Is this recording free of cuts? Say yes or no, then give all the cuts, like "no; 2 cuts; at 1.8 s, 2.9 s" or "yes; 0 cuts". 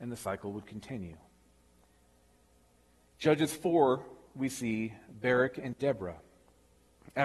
yes; 0 cuts